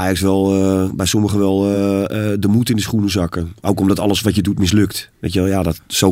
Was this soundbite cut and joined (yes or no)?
no